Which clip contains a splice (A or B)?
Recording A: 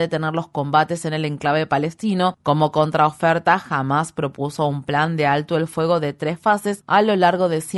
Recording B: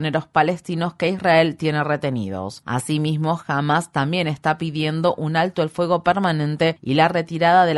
A